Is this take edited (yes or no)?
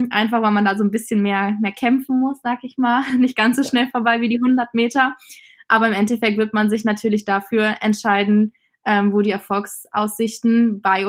no